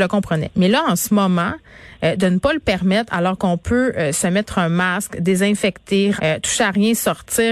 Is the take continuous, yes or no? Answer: no